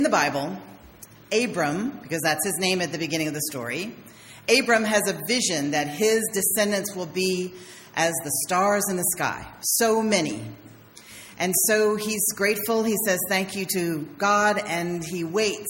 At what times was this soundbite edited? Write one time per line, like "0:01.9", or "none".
none